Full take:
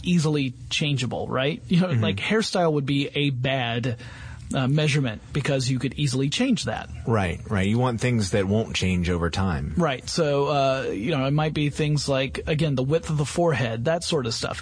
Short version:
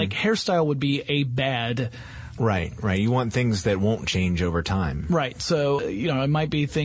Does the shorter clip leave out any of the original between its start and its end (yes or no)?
yes